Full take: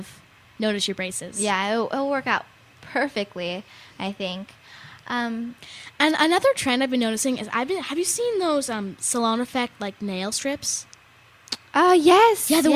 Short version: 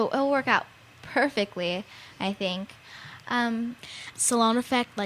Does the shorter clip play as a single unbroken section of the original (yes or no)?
no